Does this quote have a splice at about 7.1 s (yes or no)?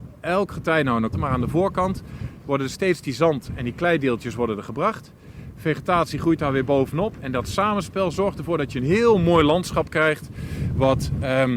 no